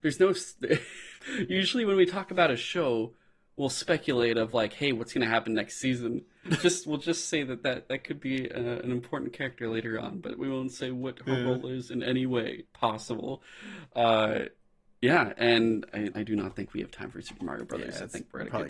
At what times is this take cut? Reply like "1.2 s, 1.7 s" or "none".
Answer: 6.5 s, 16.1 s